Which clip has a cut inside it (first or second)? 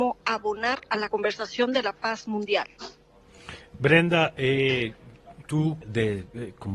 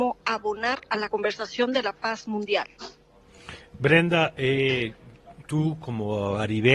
first